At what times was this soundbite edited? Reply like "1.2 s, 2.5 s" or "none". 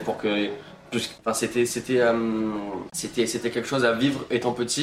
1.2 s

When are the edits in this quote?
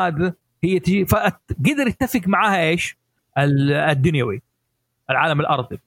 3.2 s

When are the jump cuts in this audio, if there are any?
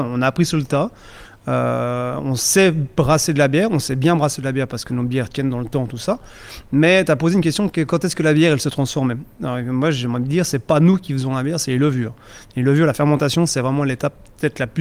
none

